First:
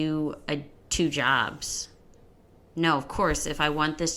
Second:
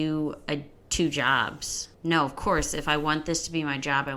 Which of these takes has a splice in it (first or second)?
second